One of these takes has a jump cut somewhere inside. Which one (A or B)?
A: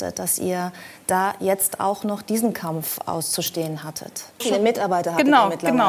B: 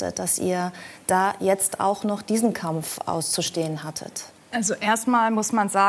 A